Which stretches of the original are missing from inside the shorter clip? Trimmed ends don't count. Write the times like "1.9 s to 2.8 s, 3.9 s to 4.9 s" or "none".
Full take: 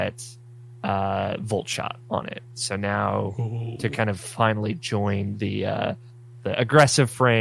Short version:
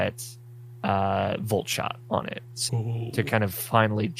2.7 s to 3.3 s